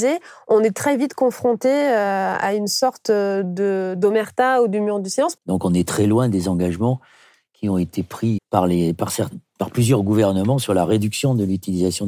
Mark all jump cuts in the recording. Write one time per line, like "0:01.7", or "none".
0:05.4
0:08.4